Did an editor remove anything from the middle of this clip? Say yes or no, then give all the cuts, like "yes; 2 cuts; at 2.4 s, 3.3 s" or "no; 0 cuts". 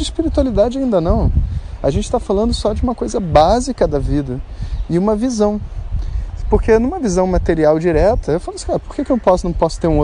no; 0 cuts